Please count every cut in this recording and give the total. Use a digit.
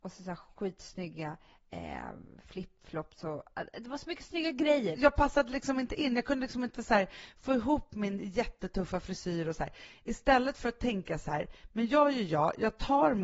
1